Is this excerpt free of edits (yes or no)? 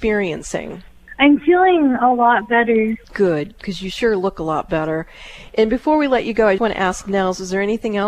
no